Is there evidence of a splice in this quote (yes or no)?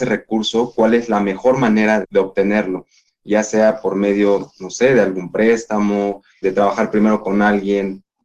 yes